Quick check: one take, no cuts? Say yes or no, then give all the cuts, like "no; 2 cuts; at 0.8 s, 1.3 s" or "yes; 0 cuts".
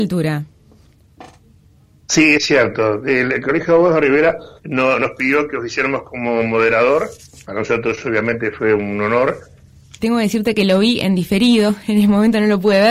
no; 2 cuts; at 4.6 s, 10.0 s